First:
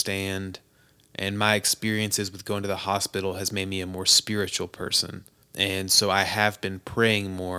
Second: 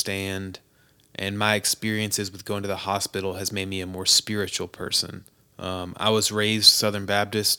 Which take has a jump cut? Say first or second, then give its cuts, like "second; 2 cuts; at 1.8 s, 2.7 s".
second; 1 cut; at 5.4 s